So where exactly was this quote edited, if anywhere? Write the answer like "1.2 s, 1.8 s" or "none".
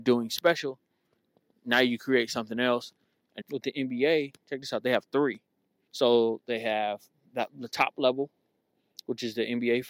3.4 s, 5.9 s